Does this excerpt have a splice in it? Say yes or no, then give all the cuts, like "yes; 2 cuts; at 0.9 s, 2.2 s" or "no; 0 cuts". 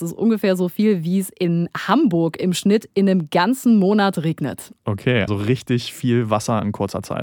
yes; 1 cut; at 5.3 s